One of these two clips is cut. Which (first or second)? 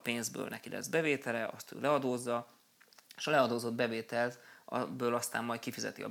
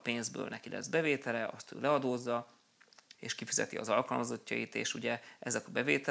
second